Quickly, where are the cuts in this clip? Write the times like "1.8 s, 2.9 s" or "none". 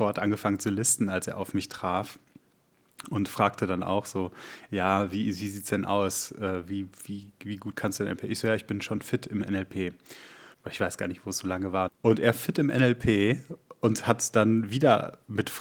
10.5 s, 11.9 s

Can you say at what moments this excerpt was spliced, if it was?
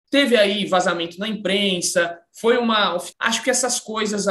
3.1 s

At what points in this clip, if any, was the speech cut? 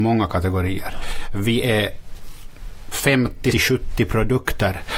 3.5 s

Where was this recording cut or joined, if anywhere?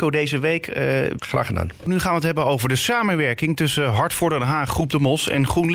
1.2 s

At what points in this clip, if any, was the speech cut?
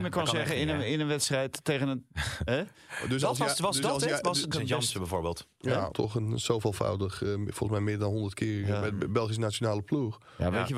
4.5 s, 5.9 s

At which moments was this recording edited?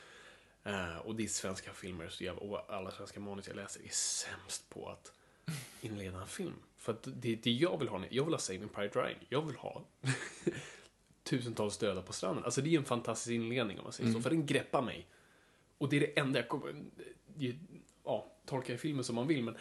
none

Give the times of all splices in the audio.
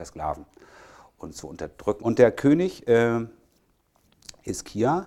2.0 s

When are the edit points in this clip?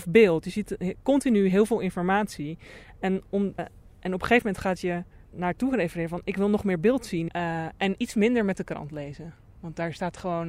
3.6 s, 5.2 s, 7.3 s

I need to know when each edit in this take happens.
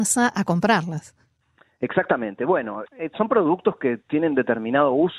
2.9 s

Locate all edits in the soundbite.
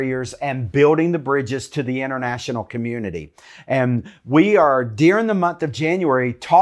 none

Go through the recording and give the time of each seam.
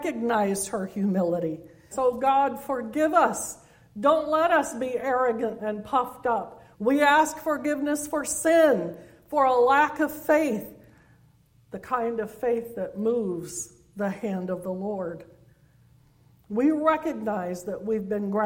1.9 s, 6.7 s

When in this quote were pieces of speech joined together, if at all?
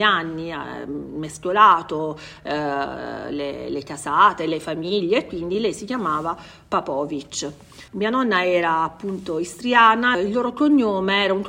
7.9 s, 10.1 s

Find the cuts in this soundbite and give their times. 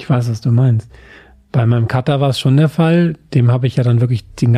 none

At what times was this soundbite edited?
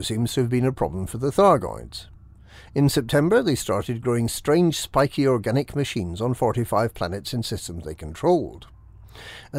none

